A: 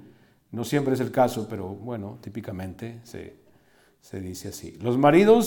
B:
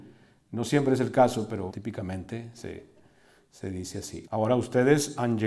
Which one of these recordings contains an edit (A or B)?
B